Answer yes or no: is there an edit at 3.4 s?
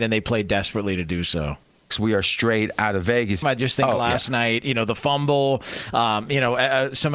yes